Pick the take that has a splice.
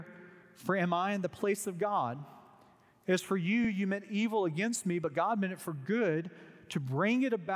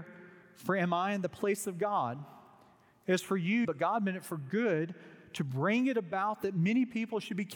second; 1 cut; at 3.6 s

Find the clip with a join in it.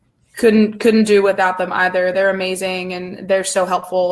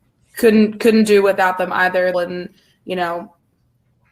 second; 1 cut; at 2.1 s

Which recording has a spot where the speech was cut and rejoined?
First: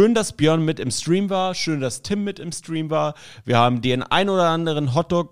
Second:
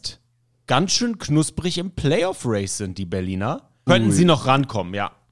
second; 1 cut; at 3.9 s

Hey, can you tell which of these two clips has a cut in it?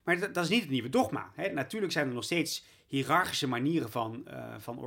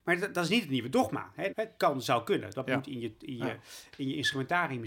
second; 1 cut; at 1.5 s

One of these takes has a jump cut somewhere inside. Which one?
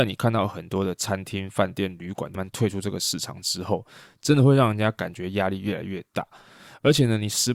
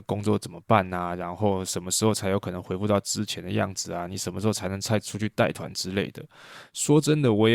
first; 1 cut; at 2.3 s

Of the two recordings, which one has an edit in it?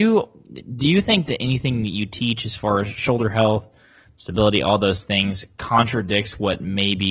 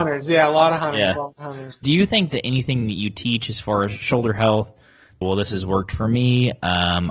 second; 2 cuts; at 1.8 s, 5.2 s

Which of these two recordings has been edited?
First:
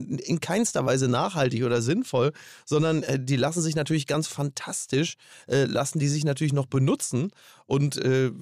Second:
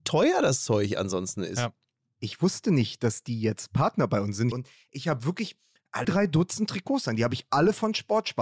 second; 2 cuts; at 4.5 s, 6.0 s

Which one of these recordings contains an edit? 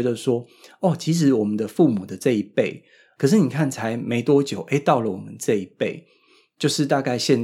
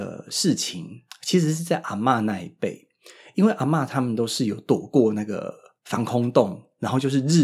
first; 1 cut; at 3.2 s

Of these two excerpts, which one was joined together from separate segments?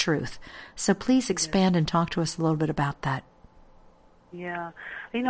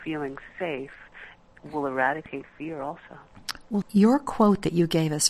second; 1 cut; at 3.8 s

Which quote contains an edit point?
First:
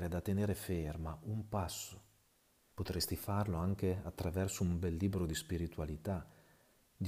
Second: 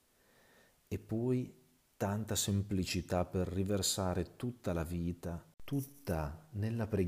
first; 1 cut; at 2.7 s

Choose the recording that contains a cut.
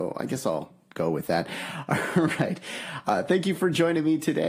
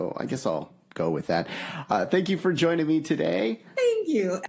second; 1 cut; at 1.8 s

